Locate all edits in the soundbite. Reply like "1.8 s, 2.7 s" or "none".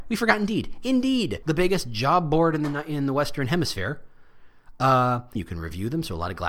1.4 s, 5.4 s